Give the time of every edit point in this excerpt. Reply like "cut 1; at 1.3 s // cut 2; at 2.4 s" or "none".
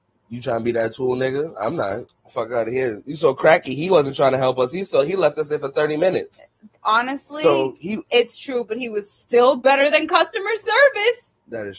none